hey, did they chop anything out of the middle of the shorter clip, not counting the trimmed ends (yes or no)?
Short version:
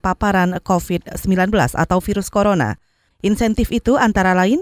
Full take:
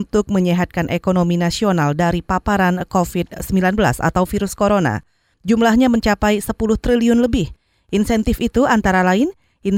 yes